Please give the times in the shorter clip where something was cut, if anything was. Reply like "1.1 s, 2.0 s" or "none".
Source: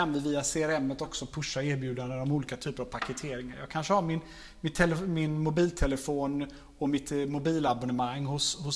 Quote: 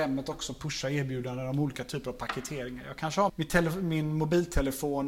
3.3 s